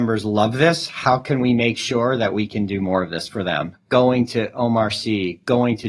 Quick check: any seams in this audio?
yes; 1 cut; at 3.7 s

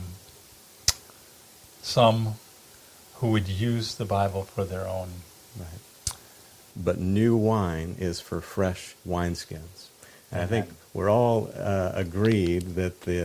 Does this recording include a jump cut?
yes; 2 cuts; at 6.7 s, 9.0 s

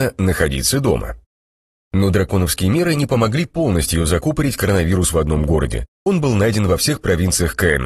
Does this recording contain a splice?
no; 0 cuts

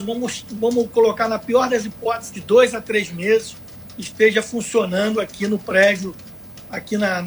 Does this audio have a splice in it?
yes; 1 cut; at 2.3 s

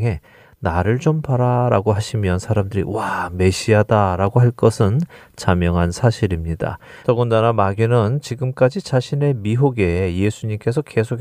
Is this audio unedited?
no; 1 cut; at 7.0 s

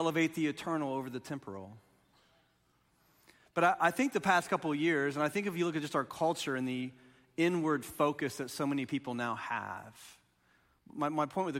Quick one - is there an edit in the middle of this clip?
no; 0 cuts

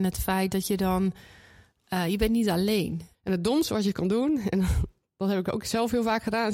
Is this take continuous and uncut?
no; 1 cut; at 3.1 s

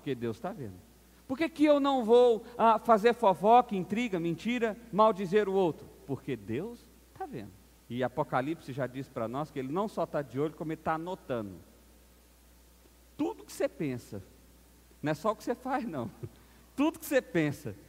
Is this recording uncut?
no; 1 cut; at 7.8 s

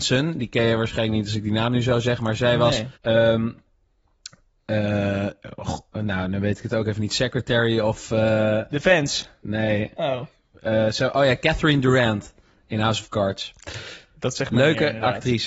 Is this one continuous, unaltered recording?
no; 1 cut; at 3.0 s

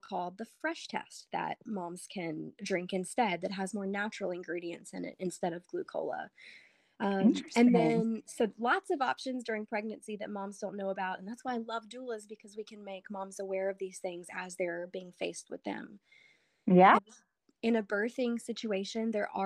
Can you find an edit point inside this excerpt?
yes; 1 cut; at 17.0 s

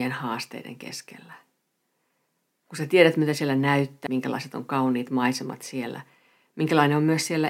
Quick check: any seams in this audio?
yes; 1 cut; at 4.1 s

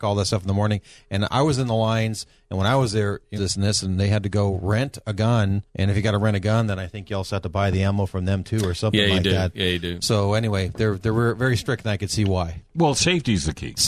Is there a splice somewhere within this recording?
yes; 2 cuts; at 3.4 s, 5.7 s

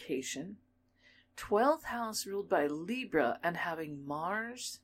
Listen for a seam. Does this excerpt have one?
no; 0 cuts

